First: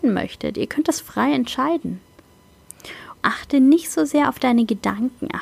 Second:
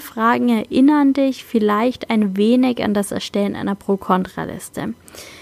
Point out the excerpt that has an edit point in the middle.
first; 1 cut; at 3.1 s

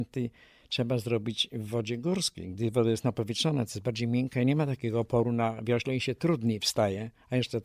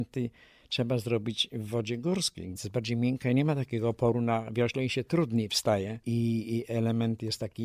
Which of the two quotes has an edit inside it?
second; 2 cuts; at 2.6 s, 6.0 s

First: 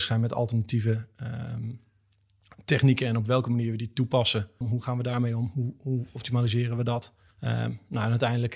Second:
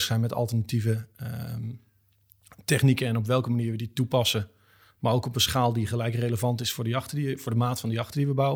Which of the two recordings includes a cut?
first; 2 cuts; at 4.6 s, 7.3 s

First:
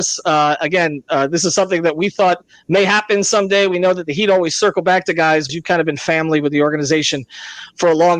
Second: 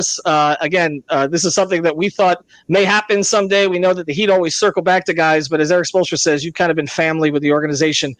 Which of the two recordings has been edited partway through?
first; 1 cut; at 5.5 s

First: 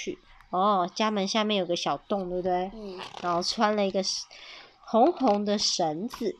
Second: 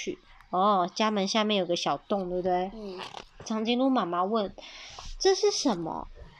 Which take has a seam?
second; 1 cut; at 3.2 s

